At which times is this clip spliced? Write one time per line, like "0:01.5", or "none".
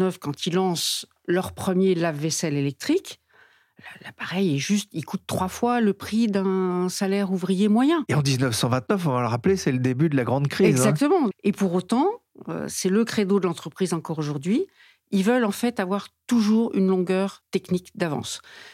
0:11.3